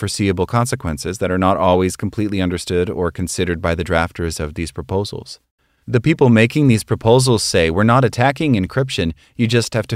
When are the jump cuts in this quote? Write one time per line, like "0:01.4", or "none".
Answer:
0:05.8

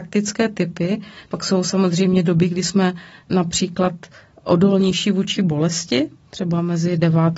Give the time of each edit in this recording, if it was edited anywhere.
0:01.2

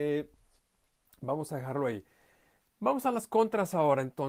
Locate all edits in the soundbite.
none

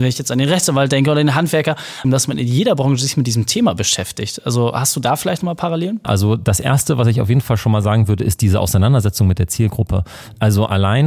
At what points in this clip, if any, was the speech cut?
0:02.0
0:06.0

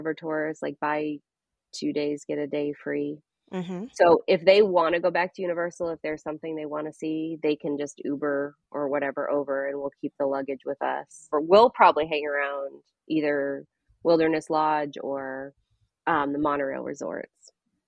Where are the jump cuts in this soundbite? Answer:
0:11.3

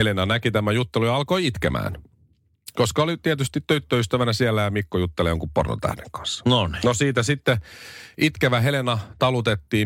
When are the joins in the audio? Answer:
none

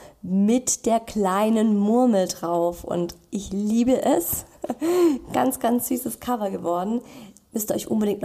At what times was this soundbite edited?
none

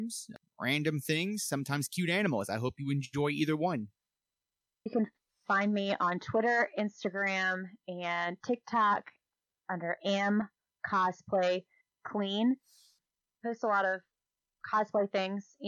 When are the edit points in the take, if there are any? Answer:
0:04.9

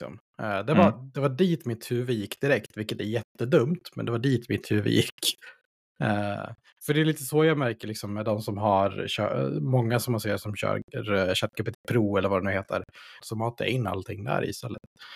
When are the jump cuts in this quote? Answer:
0:11.7
0:13.2

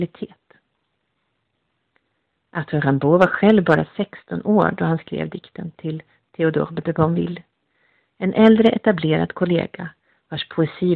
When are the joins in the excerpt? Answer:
none

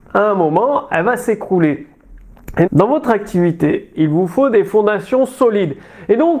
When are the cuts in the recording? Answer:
0:02.7
0:03.9

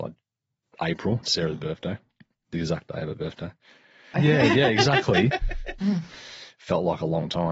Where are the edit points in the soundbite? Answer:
0:04.1
0:05.8

